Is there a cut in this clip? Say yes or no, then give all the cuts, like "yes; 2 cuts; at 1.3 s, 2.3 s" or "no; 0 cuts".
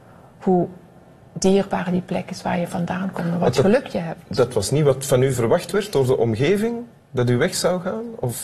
no; 0 cuts